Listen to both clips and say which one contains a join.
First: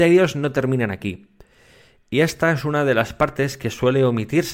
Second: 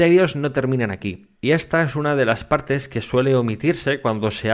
second; 1 cut; at 1.3 s

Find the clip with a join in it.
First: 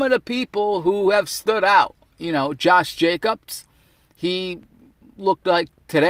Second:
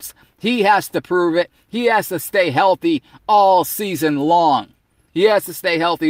second; 1 cut; at 5.1 s

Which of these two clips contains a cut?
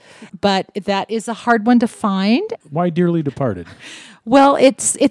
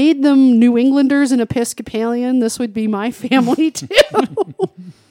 first; 1 cut; at 2.6 s

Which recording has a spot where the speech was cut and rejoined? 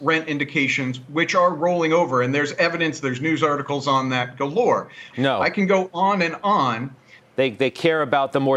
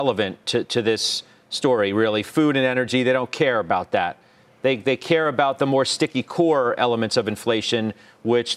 first; 2 cuts; at 5.1 s, 7.2 s

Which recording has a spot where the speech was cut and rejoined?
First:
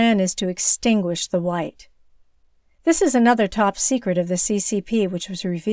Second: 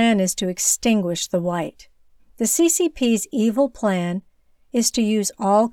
second; 1 cut; at 2.2 s

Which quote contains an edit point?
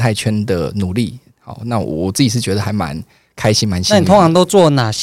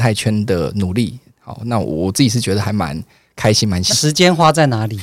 second; 1 cut; at 3.9 s

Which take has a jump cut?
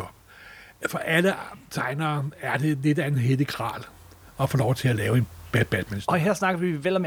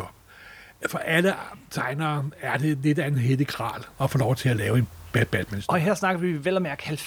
second; 1 cut; at 3.9 s

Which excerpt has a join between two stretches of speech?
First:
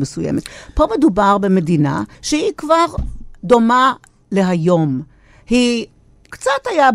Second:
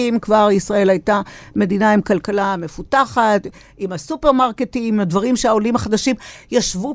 first; 1 cut; at 2.1 s

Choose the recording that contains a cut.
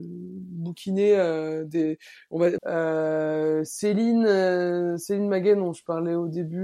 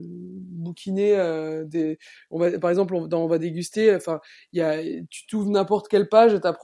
first; 1 cut; at 2.6 s

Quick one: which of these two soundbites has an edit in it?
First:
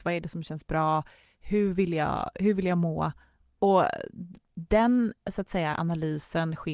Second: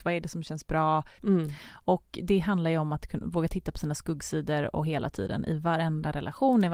second; 1 cut; at 1.2 s

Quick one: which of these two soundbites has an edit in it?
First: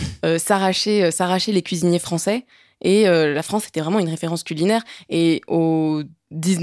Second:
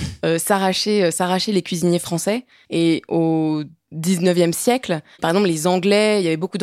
second; 2 cuts; at 2.6 s, 5.2 s

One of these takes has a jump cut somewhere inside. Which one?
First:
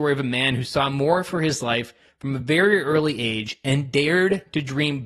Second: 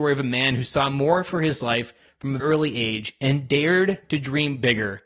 second; 1 cut; at 2.4 s

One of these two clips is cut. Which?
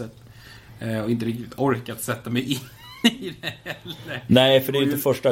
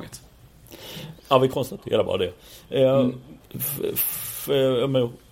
second; 2 cuts; at 1.2 s, 3.4 s

